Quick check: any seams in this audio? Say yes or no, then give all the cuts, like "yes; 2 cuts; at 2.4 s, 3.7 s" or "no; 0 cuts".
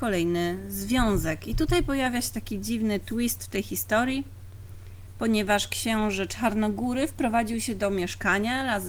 no; 0 cuts